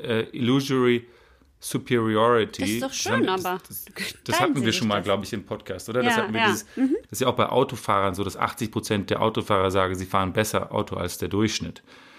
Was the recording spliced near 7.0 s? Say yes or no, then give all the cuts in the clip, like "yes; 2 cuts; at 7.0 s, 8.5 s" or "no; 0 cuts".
yes; 1 cut; at 7.0 s